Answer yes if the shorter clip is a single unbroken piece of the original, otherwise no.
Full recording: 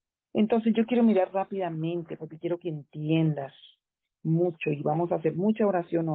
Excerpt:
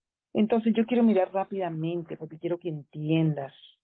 yes